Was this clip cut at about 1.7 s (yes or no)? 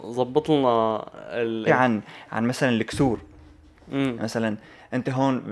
yes